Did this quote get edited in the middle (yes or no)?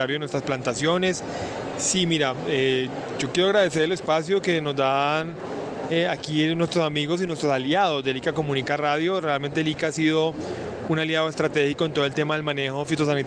yes